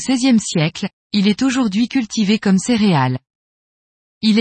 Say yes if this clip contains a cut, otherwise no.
no